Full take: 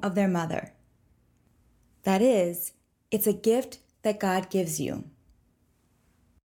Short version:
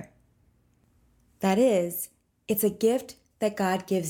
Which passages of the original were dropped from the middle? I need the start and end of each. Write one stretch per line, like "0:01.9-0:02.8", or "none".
none